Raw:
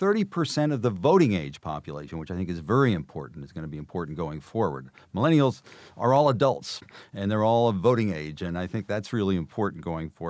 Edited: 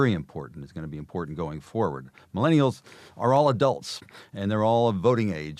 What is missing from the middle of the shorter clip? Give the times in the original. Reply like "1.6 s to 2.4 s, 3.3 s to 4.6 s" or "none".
none